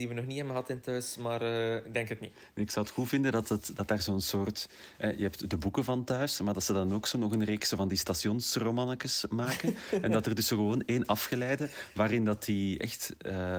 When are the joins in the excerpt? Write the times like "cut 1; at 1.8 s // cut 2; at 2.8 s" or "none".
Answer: none